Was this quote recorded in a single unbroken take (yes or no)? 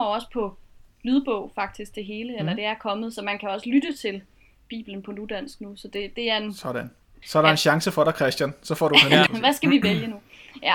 no